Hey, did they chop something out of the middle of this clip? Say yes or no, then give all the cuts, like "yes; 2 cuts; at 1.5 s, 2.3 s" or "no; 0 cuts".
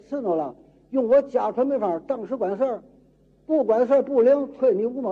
no; 0 cuts